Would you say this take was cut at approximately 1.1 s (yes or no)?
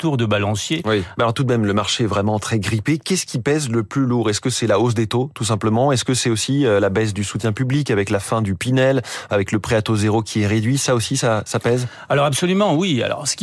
yes